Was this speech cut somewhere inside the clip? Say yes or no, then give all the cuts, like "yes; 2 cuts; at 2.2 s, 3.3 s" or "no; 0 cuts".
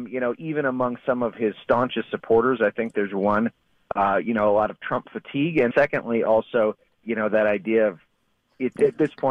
yes; 2 cuts; at 5.7 s, 7.0 s